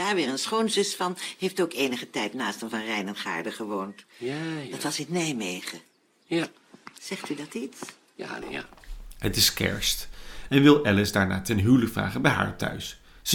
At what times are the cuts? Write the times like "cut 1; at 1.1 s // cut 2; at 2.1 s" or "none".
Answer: cut 1; at 8.4 s // cut 2; at 10.5 s